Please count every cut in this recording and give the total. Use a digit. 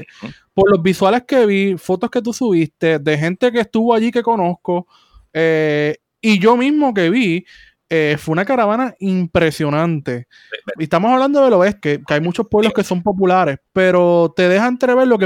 2